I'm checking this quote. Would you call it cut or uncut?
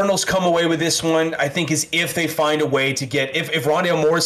uncut